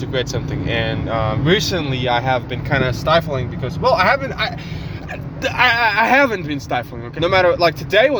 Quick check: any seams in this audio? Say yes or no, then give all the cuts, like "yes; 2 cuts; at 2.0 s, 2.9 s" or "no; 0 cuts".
yes; 1 cut; at 7.2 s